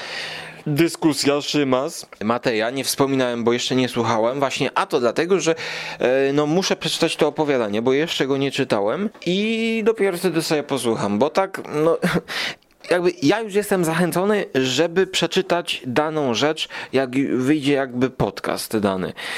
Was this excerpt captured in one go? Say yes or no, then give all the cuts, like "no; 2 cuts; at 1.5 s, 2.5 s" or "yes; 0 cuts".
yes; 0 cuts